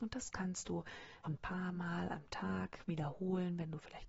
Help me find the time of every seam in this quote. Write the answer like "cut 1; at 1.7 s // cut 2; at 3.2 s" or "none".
cut 1; at 1.2 s